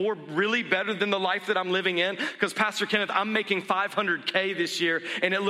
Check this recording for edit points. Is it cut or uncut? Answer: uncut